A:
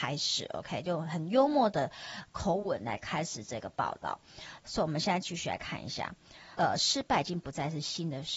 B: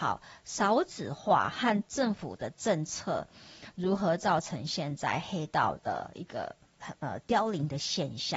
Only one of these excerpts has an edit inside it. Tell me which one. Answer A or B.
A